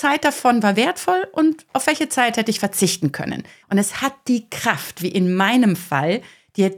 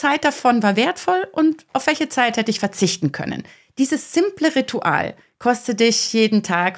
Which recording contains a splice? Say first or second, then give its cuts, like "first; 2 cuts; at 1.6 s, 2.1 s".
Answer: first; 1 cut; at 3.6 s